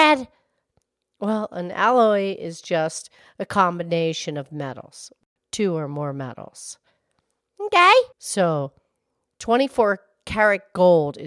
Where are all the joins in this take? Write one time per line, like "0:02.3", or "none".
0:08.1